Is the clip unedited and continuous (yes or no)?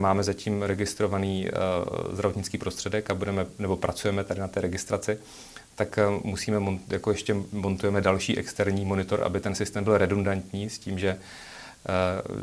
yes